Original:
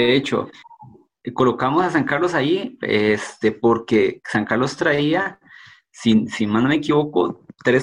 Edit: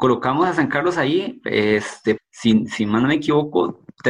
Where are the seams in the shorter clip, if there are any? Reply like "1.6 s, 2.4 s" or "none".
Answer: 2.2 s